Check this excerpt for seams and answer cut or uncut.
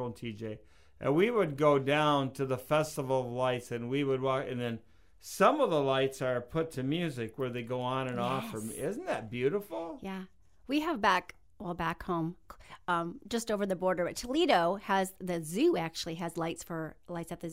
uncut